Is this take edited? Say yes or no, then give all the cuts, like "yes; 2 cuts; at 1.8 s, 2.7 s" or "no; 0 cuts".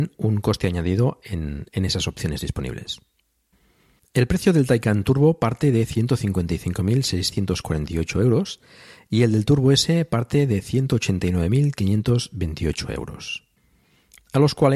yes; 1 cut; at 4.0 s